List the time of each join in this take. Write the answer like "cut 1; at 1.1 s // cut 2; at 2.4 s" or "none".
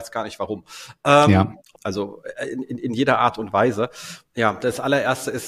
cut 1; at 1.7 s // cut 2; at 4.2 s